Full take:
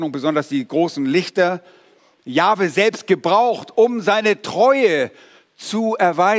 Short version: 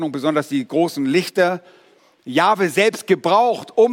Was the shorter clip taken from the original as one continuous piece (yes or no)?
yes